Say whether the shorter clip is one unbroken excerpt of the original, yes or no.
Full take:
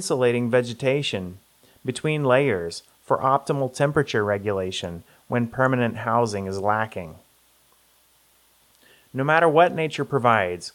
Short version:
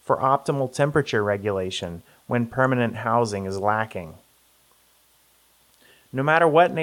yes